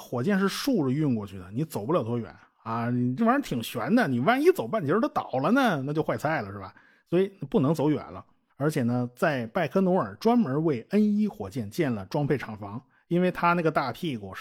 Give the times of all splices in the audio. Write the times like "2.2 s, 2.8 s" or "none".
3.2 s, 8.5 s